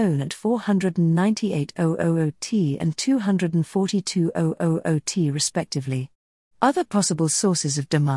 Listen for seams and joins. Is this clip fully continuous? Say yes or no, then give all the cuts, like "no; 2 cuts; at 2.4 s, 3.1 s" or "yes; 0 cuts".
yes; 0 cuts